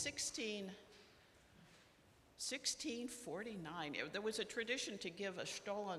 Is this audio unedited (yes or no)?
yes